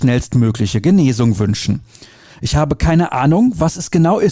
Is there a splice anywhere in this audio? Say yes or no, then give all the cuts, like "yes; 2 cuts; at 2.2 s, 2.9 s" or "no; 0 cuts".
yes; 1 cut; at 2.3 s